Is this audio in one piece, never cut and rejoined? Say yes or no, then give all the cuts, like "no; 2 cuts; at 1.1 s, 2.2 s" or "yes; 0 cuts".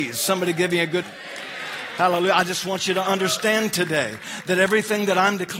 no; 1 cut; at 1.0 s